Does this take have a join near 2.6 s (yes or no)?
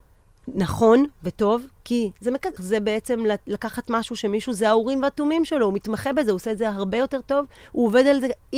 yes